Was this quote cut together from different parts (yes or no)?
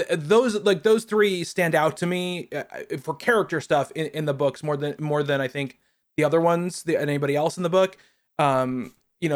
no